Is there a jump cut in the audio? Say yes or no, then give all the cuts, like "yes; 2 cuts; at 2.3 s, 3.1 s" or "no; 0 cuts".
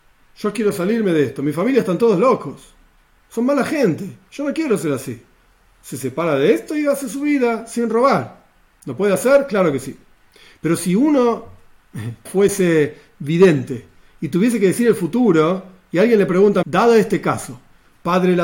yes; 2 cuts; at 12.3 s, 16.6 s